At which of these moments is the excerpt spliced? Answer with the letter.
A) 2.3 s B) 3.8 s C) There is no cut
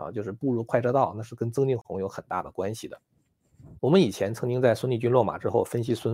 B